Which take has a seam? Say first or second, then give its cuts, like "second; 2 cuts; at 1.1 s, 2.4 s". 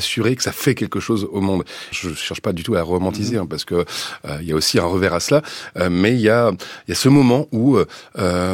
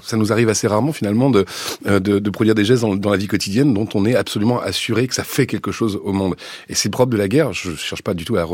first; 1 cut; at 1.9 s